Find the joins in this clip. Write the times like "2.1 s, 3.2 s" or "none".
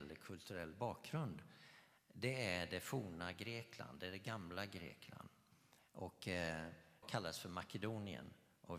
7.0 s